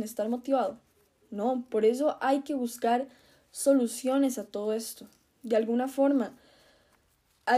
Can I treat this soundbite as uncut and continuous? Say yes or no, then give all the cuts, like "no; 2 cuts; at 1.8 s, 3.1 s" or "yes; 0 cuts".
yes; 0 cuts